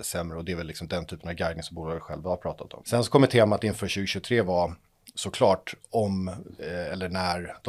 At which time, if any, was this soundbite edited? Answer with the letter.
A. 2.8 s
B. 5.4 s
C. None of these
A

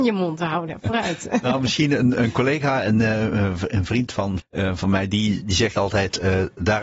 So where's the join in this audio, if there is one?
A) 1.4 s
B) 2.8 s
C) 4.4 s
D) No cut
C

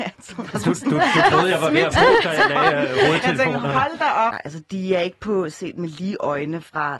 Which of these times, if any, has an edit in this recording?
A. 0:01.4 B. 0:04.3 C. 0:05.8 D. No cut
B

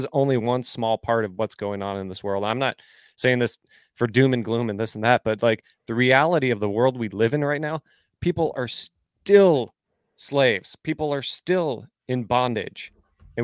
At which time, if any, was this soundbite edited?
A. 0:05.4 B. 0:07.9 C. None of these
C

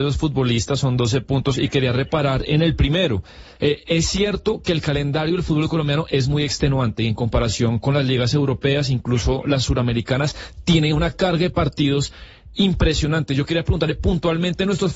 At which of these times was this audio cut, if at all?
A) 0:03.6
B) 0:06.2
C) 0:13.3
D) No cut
A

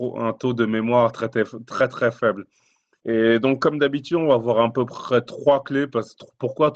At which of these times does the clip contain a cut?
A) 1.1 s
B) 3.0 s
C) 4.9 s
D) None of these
B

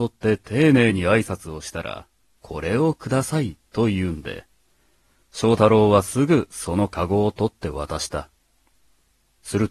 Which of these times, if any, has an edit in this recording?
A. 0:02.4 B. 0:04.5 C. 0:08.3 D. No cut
A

